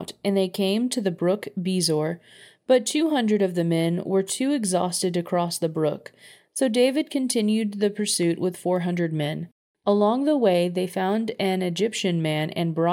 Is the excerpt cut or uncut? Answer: uncut